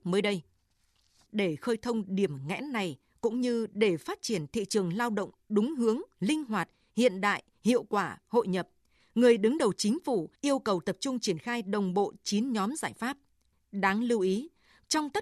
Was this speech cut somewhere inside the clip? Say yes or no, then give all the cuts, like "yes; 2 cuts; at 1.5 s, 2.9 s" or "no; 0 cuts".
yes; 1 cut; at 8.2 s